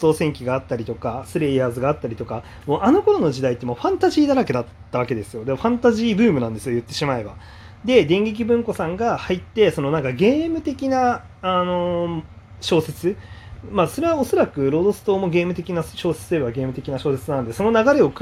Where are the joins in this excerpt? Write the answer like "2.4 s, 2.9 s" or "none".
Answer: 7.8 s

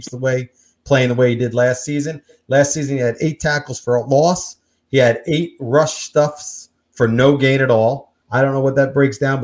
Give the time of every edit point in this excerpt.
8.2 s

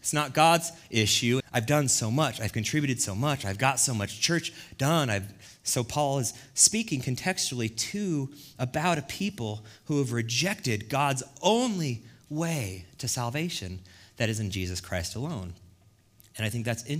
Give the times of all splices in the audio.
1.4 s

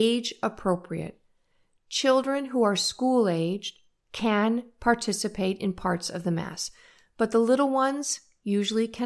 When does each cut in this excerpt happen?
none

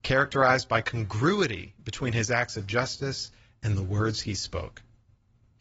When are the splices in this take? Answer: none

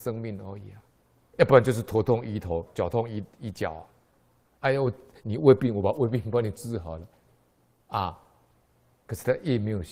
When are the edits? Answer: 1.3 s

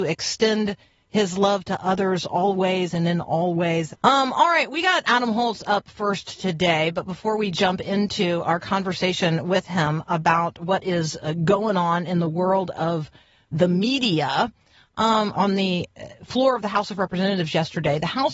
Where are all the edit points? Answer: 3.9 s, 5.0 s, 15.3 s

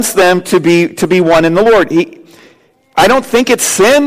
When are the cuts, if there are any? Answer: none

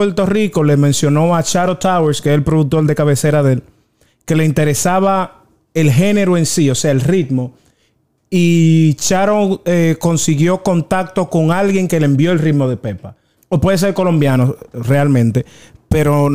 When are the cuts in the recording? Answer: 13.4 s

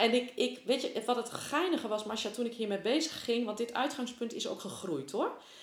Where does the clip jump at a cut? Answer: none

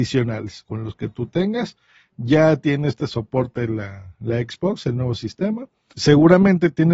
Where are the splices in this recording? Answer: 5.9 s

